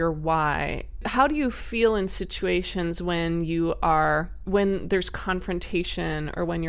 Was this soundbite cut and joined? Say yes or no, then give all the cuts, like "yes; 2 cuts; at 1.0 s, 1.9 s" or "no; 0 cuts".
no; 0 cuts